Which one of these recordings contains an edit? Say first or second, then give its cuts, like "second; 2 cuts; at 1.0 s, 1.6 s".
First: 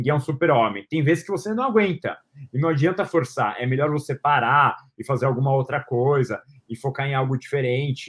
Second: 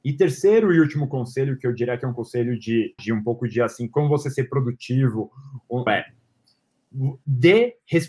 second; 2 cuts; at 3.0 s, 5.9 s